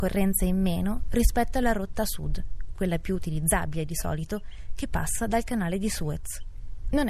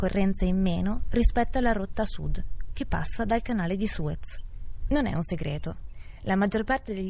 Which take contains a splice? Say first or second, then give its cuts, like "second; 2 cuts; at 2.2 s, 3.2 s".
second; 1 cut; at 2.7 s